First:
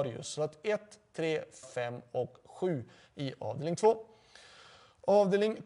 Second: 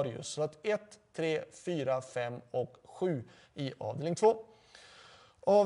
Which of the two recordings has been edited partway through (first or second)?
first